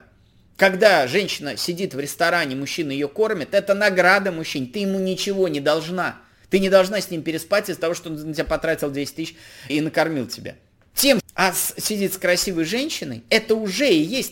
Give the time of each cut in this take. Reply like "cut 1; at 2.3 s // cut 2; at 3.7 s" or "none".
cut 1; at 9.7 s // cut 2; at 11.2 s